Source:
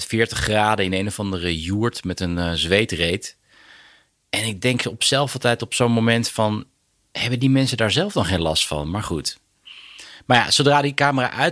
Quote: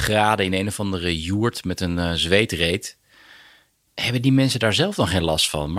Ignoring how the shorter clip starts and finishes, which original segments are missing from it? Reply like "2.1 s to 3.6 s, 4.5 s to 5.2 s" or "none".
4.3 s to 7.0 s